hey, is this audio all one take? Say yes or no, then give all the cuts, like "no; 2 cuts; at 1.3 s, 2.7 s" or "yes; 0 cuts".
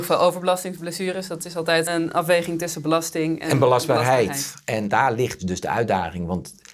no; 1 cut; at 1.9 s